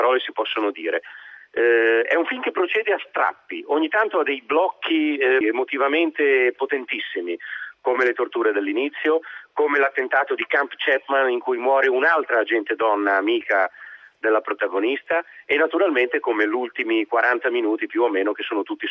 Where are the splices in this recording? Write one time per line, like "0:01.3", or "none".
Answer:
0:05.4